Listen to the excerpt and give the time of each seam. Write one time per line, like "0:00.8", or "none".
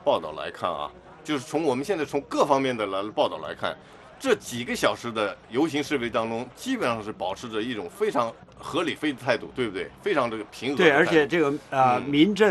none

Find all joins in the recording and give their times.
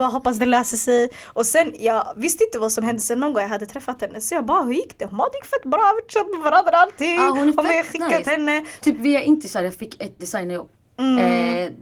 0:03.0
0:08.8
0:10.2

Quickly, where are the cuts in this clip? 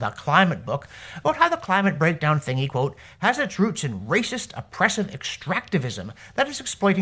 none

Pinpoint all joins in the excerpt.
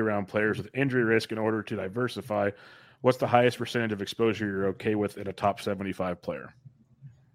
none

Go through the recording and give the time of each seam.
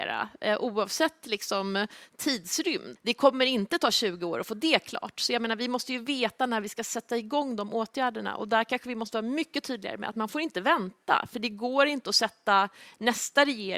0:03.0

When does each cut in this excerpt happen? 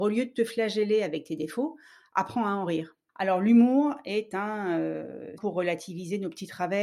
0:03.1
0:05.4

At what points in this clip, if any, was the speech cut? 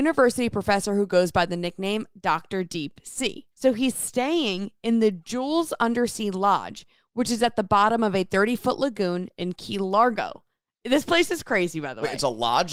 0:03.5

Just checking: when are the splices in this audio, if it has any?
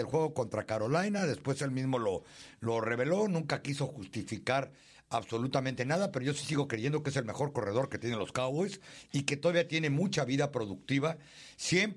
none

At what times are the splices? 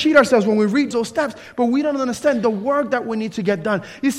0:00.9

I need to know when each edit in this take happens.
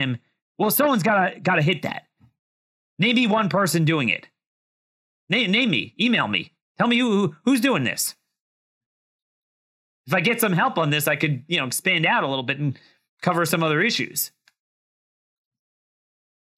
none

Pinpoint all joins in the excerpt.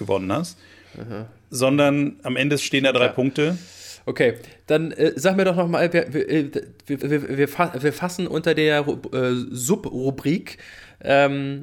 0:07.0

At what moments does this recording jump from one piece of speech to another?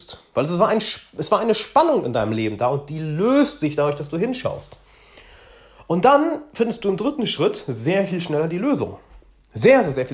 none

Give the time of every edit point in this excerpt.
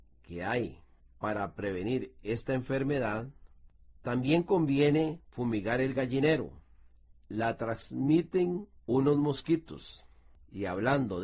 0:07.1
0:08.8

